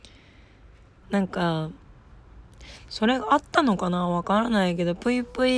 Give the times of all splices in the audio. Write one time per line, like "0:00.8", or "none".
0:01.0
0:02.9